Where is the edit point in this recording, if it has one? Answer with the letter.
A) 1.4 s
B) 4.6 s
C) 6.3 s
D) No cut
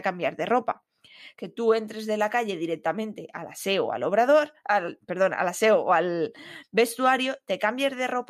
A